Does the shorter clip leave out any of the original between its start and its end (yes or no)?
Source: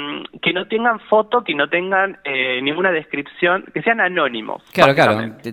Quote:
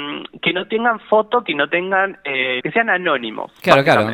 yes